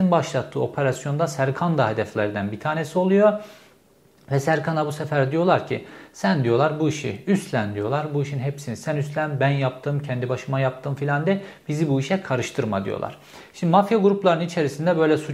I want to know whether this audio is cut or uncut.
uncut